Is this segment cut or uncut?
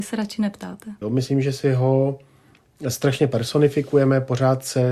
cut